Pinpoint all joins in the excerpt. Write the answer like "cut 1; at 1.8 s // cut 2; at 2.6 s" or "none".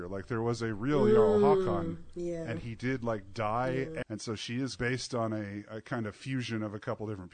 cut 1; at 4.0 s